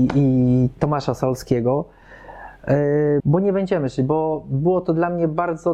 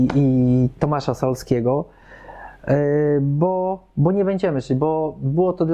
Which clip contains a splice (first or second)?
first